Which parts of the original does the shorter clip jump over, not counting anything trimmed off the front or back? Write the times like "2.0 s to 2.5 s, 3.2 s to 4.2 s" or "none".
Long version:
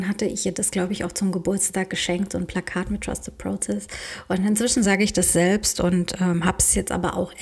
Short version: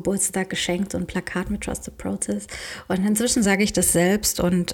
none

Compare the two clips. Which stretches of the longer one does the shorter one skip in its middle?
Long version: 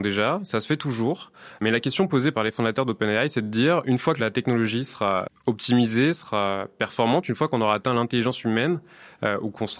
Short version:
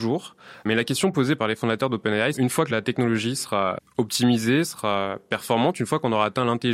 3.3 s to 3.8 s

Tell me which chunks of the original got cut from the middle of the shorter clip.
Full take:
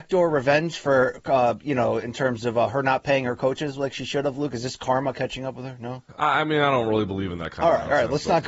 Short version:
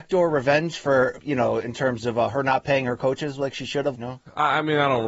1.2 s to 1.6 s, 4.3 s to 5.8 s

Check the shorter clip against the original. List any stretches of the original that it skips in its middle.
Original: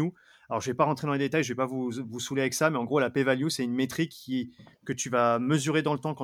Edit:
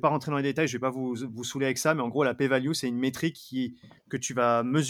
none

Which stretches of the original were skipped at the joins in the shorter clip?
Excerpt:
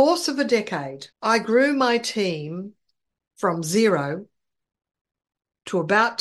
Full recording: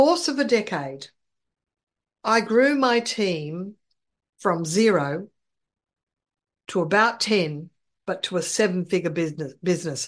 1.1 s to 2.1 s

